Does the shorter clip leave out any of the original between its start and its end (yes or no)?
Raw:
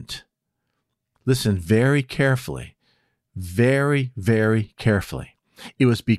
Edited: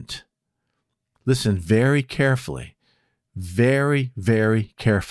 no